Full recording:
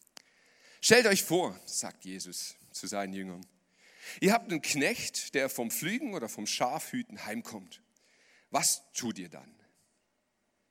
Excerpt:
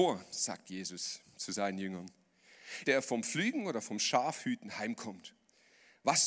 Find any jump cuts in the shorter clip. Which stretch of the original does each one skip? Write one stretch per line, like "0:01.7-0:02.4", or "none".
0:04.2-0:05.3